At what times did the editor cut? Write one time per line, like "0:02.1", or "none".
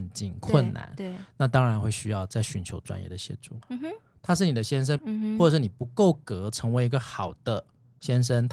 0:03.6
0:05.0